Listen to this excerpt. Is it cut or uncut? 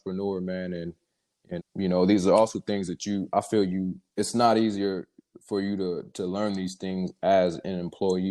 cut